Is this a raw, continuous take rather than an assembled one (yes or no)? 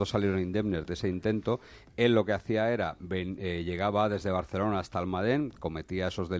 yes